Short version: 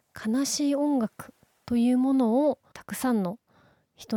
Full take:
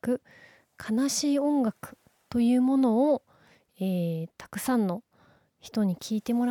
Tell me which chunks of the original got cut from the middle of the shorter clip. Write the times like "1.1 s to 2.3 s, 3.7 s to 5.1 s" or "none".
3.4 s to 4.4 s